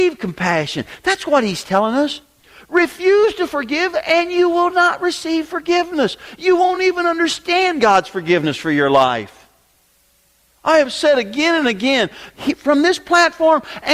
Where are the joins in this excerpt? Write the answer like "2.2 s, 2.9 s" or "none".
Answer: none